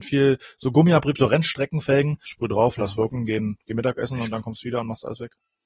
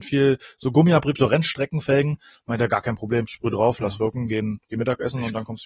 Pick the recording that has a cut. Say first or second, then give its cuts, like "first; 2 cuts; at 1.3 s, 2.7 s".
first; 1 cut; at 2.2 s